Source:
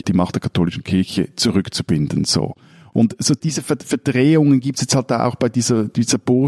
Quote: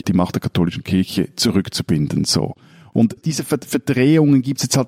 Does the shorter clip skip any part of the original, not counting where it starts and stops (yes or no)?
yes